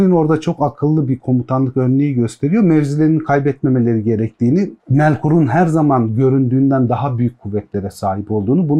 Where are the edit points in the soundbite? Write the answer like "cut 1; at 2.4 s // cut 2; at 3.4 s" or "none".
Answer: cut 1; at 4.8 s